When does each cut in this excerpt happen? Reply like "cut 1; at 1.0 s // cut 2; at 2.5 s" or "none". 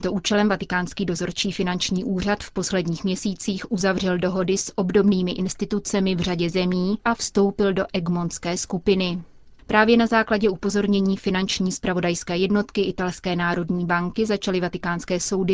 cut 1; at 7.0 s